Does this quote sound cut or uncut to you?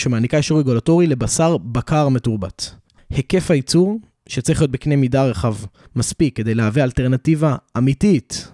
cut